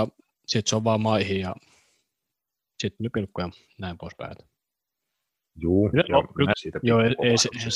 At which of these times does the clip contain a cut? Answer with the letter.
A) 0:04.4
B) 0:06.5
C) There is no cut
B